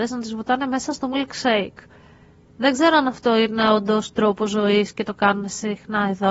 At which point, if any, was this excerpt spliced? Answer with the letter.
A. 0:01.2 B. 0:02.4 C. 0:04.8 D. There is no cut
D